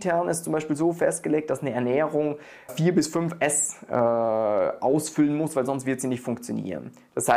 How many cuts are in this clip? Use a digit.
1